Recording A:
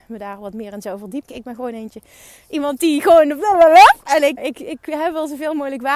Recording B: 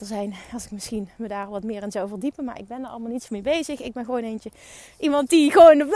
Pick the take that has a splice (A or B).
A